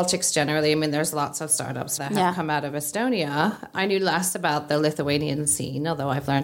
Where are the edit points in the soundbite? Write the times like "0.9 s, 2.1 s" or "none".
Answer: 2.0 s